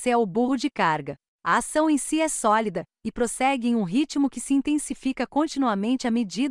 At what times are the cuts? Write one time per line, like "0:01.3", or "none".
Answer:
none